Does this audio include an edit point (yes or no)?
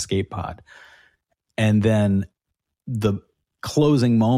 no